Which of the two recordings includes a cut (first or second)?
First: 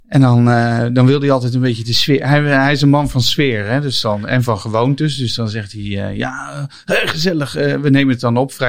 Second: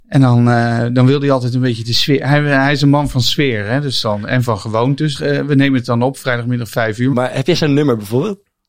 second